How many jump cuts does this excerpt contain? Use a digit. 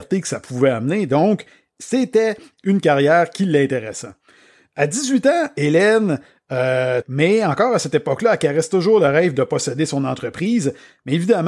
1